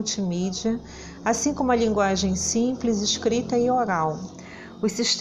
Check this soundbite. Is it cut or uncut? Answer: uncut